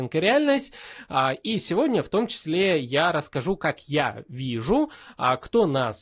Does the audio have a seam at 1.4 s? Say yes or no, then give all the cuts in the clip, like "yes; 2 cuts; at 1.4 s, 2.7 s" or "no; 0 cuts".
no; 0 cuts